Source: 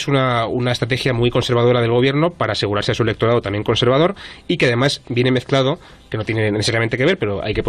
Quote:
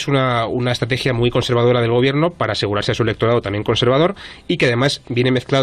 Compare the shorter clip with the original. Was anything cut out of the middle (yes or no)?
no